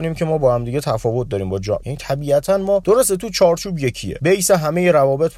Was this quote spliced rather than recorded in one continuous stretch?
yes; 1 cut; at 1.8 s

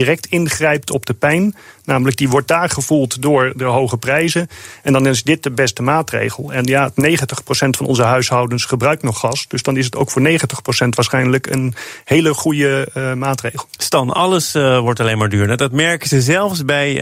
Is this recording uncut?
yes; 0 cuts

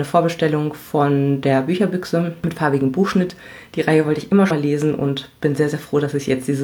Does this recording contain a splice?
yes; 1 cut; at 4.5 s

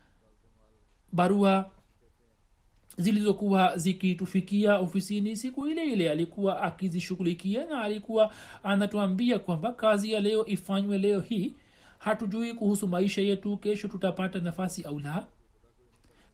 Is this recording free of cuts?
yes; 0 cuts

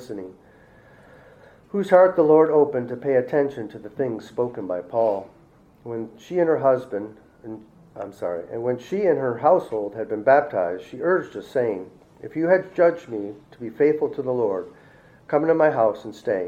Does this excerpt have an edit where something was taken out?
no; 0 cuts

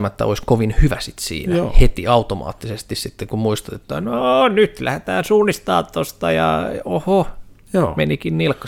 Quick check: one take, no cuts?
yes; 0 cuts

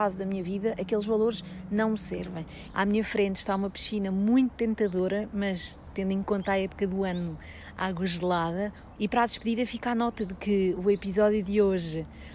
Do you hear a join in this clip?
yes; 2 cuts; at 2.7 s, 9.0 s

